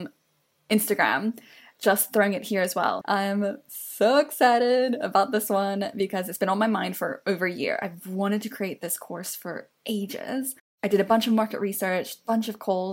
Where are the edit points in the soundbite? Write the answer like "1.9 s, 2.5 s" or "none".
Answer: 3.0 s